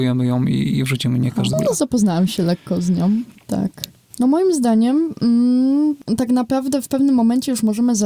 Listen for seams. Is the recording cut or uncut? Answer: cut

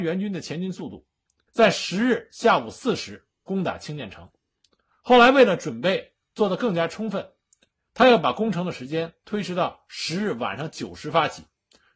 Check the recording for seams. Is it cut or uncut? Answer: cut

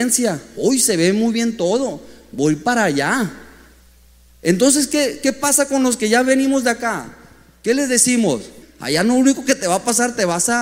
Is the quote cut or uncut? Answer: cut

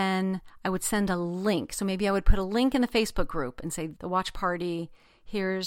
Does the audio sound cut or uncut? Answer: cut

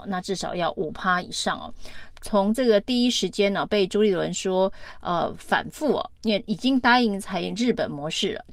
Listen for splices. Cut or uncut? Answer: cut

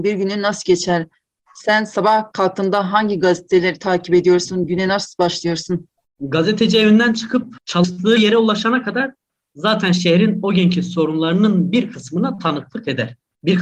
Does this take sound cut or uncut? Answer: uncut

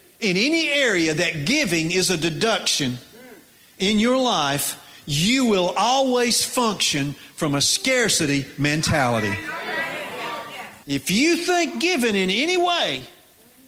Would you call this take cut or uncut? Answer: cut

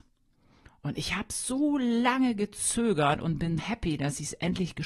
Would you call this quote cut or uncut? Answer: cut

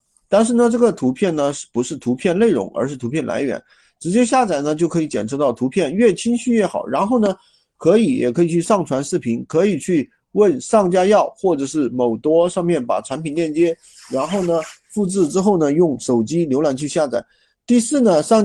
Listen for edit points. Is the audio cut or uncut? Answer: uncut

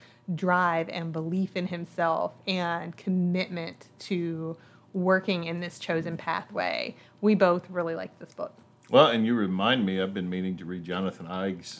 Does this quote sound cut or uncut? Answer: uncut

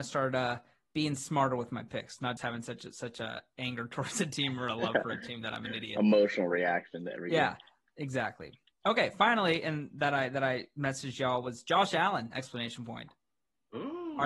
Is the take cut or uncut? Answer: cut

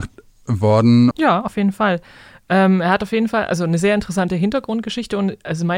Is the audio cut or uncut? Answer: cut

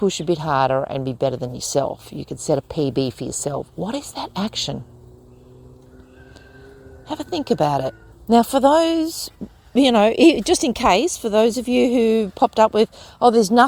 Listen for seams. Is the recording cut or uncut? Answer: cut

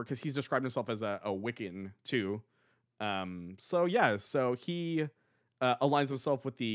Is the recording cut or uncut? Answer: uncut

